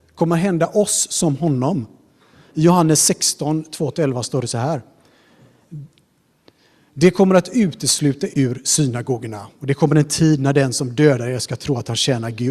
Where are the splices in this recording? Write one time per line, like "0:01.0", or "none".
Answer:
0:08.3